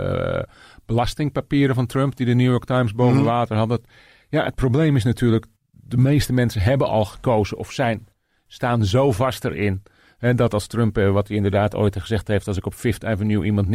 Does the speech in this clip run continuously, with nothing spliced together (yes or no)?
yes